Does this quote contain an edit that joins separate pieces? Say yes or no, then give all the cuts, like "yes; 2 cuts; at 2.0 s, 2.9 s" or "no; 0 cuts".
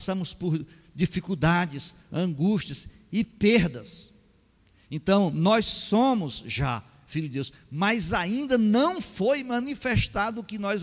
no; 0 cuts